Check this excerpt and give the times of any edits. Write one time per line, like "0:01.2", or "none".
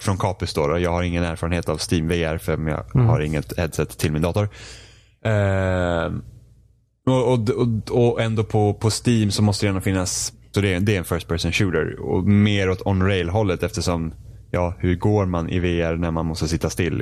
0:10.5